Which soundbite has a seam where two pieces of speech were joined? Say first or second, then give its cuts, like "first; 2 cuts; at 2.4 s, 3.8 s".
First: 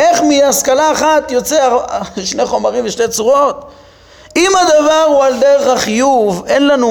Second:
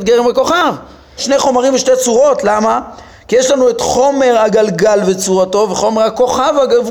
second; 1 cut; at 1.2 s